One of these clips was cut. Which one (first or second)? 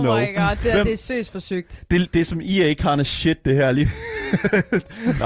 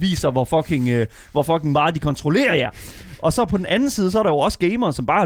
first